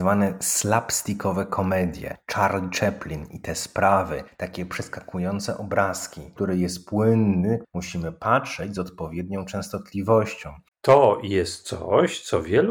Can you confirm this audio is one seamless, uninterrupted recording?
no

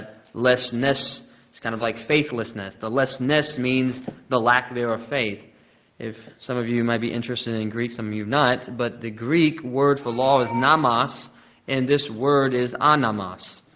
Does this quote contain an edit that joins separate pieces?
no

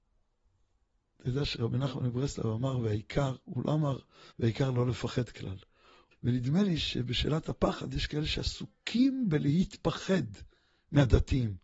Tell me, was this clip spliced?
yes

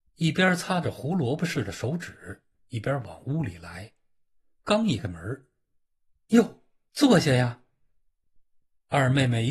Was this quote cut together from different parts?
yes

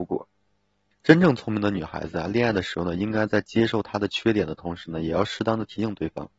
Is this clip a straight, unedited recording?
no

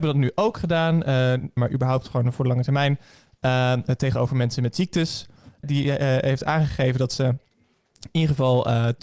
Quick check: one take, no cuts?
no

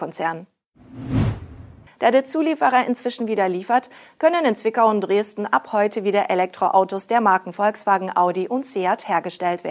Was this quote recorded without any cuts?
no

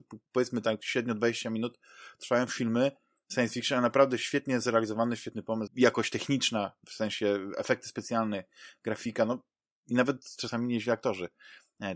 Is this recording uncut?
no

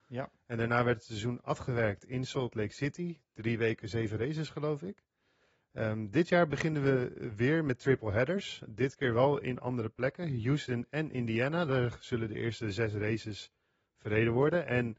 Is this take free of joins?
yes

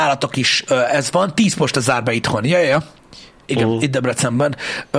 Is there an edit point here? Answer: no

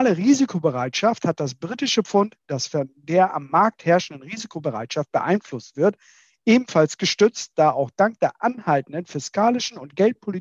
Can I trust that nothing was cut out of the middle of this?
yes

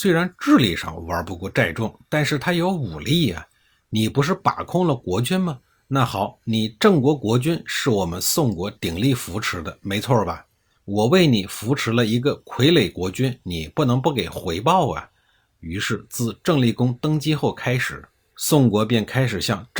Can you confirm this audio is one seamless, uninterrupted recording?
yes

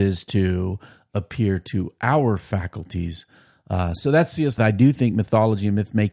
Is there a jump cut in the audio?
yes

